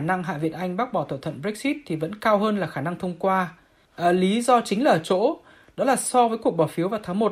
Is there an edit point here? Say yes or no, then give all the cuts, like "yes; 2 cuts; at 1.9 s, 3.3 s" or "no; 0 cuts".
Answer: no; 0 cuts